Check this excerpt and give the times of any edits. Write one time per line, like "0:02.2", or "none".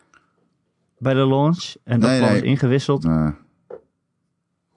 0:03.0